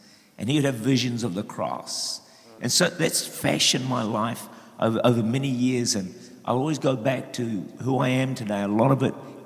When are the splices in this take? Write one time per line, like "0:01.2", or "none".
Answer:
0:02.6